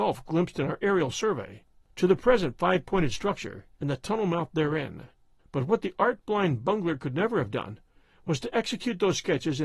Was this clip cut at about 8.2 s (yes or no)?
no